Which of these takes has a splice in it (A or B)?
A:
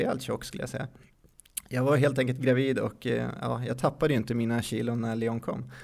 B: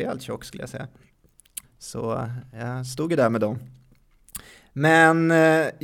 B